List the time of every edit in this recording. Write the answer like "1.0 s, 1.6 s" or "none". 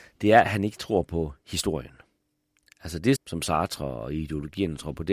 3.2 s